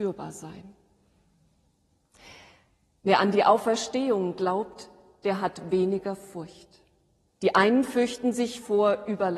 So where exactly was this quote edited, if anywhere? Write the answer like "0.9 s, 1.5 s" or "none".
7.3 s